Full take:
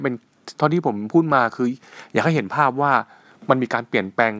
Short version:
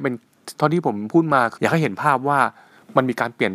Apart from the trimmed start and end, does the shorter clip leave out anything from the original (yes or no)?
yes